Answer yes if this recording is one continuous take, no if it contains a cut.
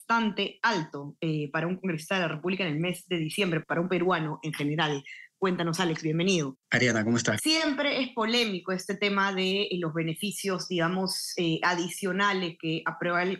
no